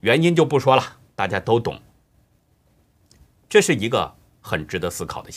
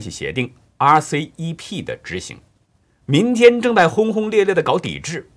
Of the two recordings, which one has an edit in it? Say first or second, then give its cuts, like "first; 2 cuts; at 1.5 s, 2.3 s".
second; 1 cut; at 2.8 s